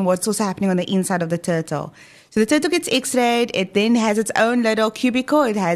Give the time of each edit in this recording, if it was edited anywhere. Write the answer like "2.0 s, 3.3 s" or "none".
none